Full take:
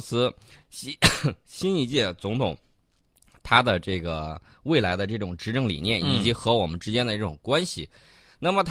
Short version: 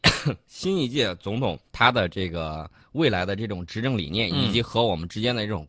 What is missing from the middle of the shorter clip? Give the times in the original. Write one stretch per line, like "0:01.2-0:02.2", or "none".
0:02.6-0:03.4